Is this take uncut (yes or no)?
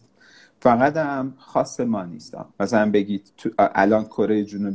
no